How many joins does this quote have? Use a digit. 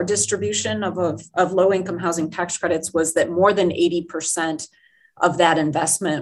0